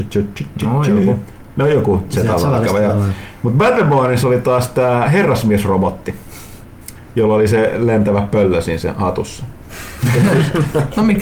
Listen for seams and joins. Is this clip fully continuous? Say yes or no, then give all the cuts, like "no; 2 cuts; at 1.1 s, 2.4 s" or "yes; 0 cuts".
yes; 0 cuts